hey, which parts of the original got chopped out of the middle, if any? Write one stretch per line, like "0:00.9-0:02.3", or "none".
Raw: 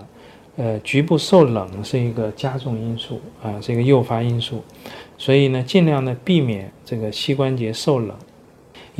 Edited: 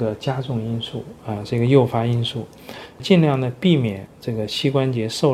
0:05.2-0:05.6